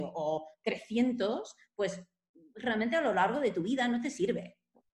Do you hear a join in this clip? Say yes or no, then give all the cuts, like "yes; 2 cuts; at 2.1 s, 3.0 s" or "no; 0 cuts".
no; 0 cuts